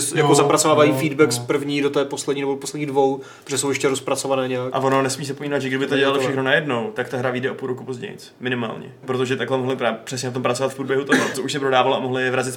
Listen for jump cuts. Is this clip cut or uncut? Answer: cut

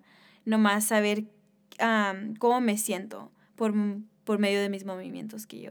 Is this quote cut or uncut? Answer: uncut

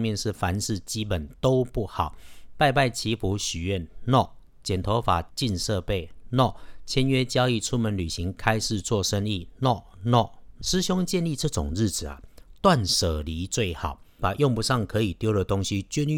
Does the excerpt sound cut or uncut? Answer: cut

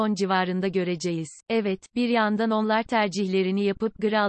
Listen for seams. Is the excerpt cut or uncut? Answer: cut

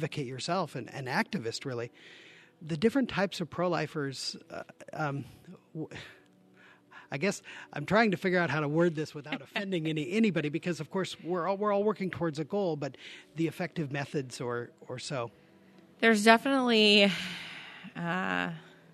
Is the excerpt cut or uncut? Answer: uncut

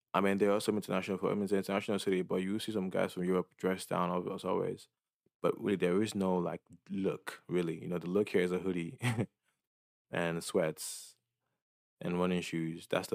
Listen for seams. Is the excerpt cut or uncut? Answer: uncut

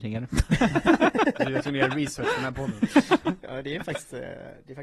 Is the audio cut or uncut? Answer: uncut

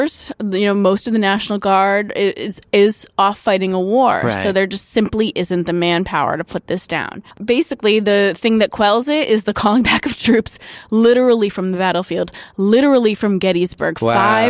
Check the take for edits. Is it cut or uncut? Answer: cut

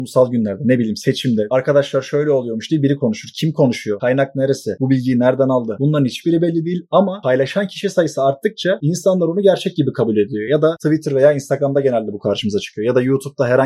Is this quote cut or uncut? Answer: uncut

